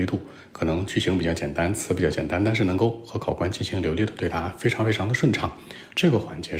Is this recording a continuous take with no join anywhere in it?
yes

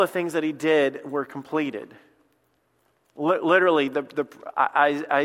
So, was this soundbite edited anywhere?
no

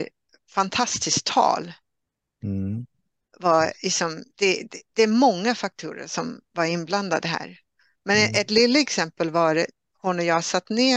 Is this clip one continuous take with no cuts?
yes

